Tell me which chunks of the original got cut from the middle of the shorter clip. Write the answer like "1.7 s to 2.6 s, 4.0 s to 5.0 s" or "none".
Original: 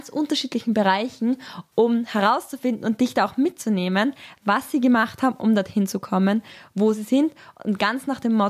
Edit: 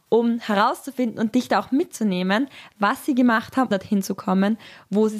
5.4 s to 5.6 s